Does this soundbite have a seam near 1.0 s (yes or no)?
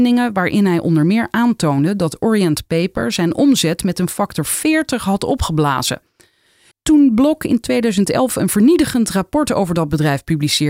no